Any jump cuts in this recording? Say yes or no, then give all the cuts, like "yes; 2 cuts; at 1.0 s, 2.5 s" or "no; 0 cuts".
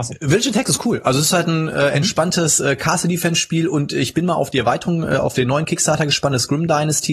no; 0 cuts